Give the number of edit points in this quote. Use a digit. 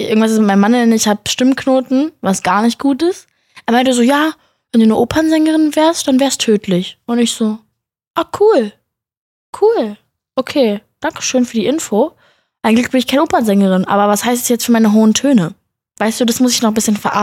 0